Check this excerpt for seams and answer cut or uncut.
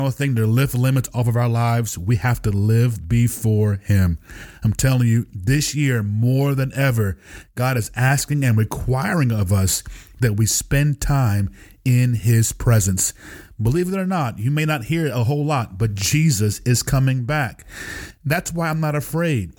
uncut